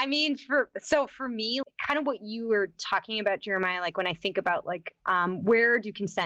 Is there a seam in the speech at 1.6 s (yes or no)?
yes